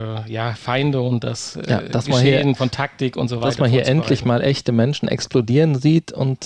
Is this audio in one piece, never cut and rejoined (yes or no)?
yes